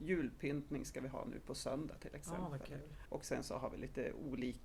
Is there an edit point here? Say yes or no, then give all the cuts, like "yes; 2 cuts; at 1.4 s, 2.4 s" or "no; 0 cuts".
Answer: yes; 1 cut; at 3.1 s